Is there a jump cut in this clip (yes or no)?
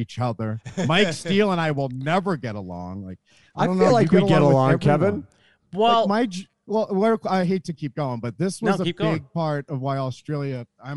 no